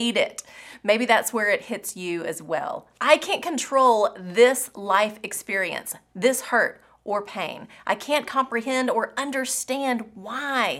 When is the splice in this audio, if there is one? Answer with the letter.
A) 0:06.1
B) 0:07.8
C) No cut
A